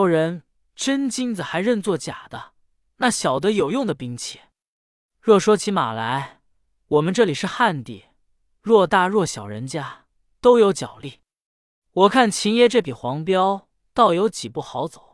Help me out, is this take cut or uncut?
uncut